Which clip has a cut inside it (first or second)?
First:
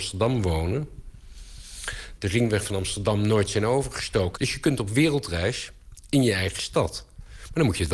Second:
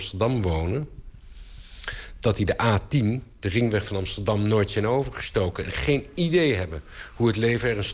first